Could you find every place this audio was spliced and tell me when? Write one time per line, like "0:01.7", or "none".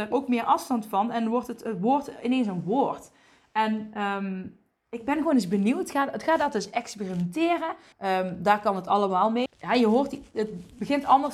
0:07.9
0:09.5